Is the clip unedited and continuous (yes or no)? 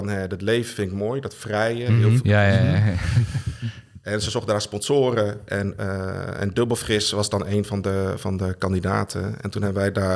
no